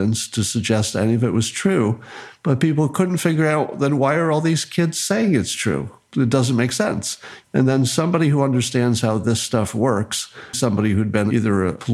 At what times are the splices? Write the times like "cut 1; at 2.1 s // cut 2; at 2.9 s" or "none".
cut 1; at 7.4 s // cut 2; at 10.5 s